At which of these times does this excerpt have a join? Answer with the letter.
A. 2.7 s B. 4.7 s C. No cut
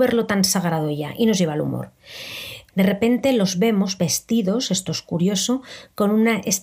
A